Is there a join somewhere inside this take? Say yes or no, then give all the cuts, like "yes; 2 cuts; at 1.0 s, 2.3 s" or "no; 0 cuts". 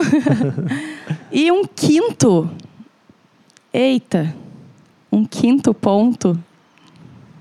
no; 0 cuts